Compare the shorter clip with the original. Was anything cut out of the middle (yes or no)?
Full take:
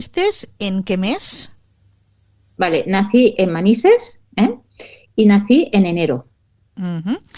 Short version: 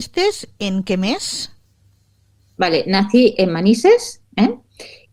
no